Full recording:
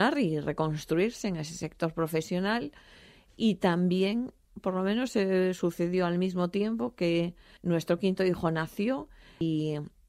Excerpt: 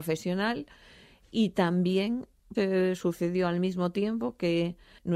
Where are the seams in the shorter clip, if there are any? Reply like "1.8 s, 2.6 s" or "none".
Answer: 2.5 s